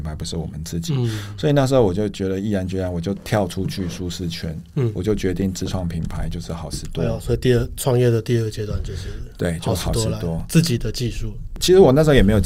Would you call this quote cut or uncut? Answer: uncut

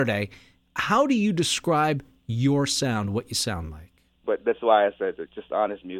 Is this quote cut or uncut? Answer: cut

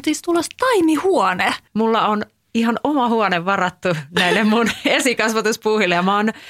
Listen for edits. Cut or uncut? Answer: cut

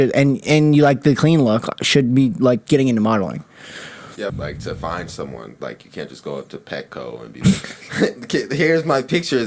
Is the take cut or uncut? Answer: cut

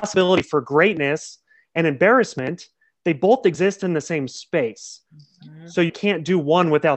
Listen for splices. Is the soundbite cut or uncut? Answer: cut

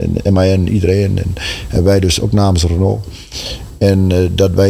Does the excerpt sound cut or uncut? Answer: uncut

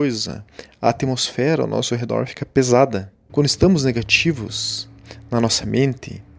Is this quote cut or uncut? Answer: cut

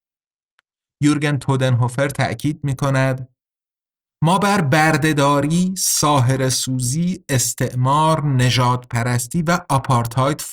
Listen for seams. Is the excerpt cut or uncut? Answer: uncut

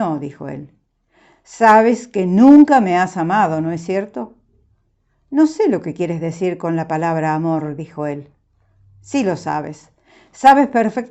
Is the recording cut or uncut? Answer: uncut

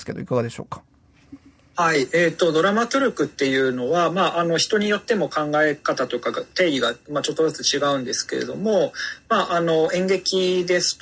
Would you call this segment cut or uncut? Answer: uncut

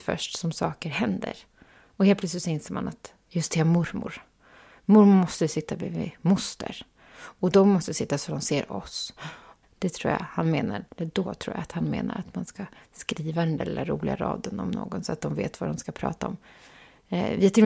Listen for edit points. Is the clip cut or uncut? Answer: cut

